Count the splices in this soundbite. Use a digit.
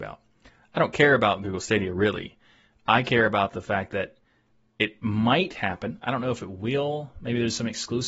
0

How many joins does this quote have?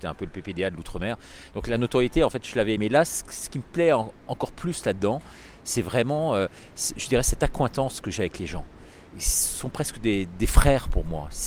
0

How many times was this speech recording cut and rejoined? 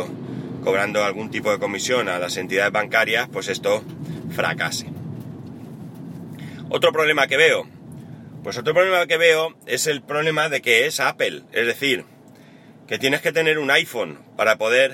0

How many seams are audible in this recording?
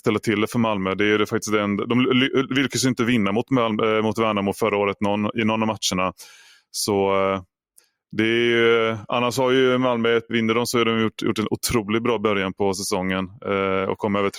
1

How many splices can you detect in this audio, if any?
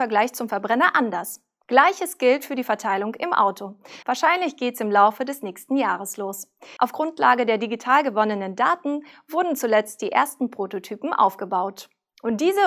2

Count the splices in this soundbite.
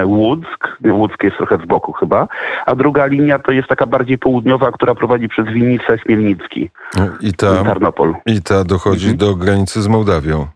0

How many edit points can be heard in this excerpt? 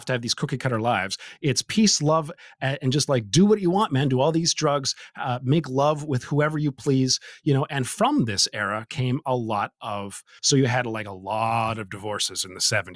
1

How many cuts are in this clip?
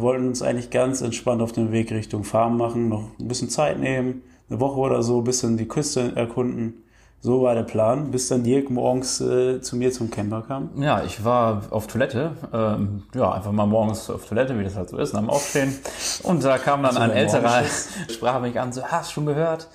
1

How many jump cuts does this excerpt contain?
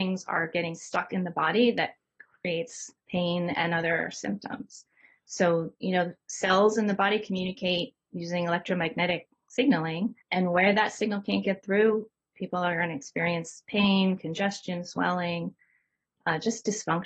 3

